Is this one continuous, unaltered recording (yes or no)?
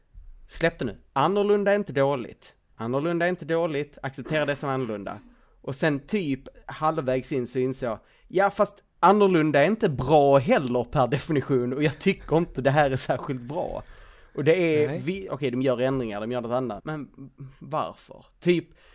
no